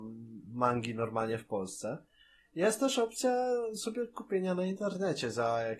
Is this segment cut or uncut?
uncut